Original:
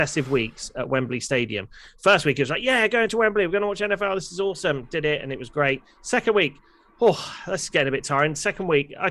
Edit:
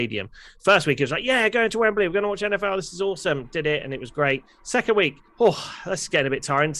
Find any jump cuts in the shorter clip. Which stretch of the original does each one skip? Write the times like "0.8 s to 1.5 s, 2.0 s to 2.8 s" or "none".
6.7 s to 6.9 s